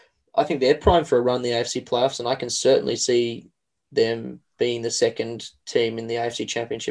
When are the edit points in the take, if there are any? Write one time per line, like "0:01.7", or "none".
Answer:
none

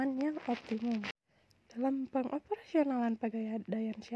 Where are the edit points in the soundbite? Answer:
0:01.5

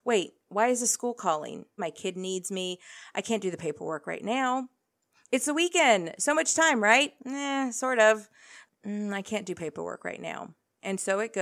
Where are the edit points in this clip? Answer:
0:01.8
0:07.2
0:08.7

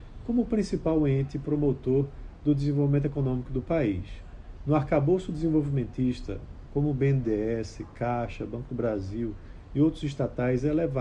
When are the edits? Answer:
0:04.6
0:06.7

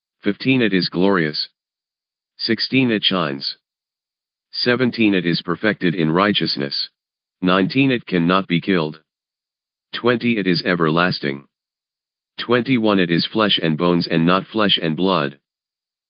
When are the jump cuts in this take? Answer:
0:07.3

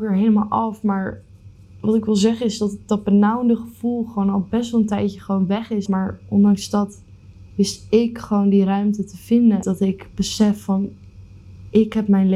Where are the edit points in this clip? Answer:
0:05.9
0:09.6

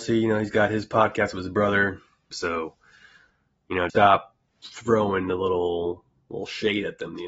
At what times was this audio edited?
0:02.3
0:03.9

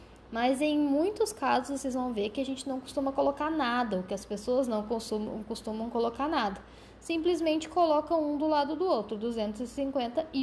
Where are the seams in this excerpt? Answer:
none

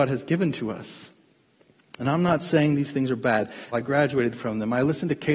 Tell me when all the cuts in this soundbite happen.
0:03.7

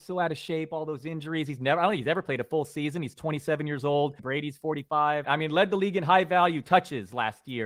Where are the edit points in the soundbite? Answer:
0:04.2
0:05.2

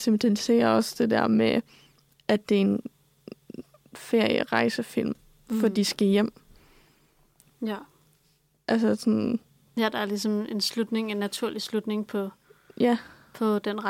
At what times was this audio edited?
none

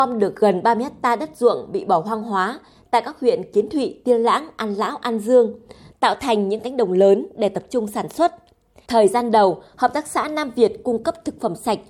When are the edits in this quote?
0:08.9

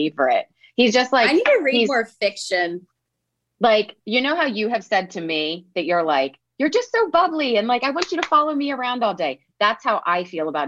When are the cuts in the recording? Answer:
none

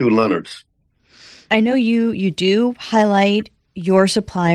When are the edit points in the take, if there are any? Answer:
none

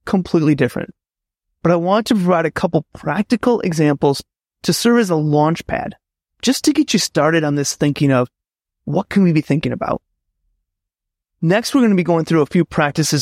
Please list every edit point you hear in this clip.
none

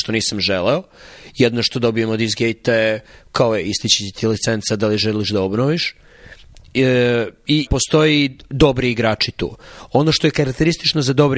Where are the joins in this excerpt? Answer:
0:07.7

